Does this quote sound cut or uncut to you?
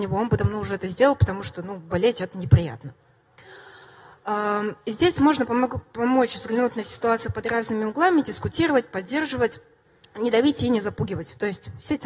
uncut